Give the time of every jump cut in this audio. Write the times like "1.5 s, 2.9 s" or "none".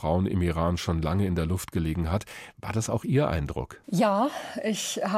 3.8 s